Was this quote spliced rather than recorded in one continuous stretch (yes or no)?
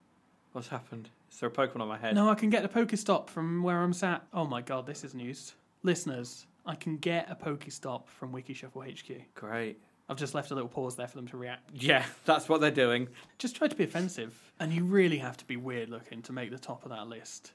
yes